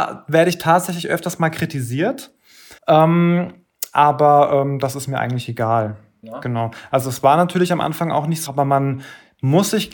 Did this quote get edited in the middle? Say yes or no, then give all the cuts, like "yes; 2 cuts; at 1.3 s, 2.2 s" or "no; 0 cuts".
yes; 3 cuts; at 2.8 s, 6.2 s, 8.5 s